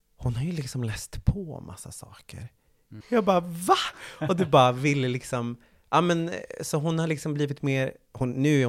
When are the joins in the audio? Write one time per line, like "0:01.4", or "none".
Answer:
0:03.0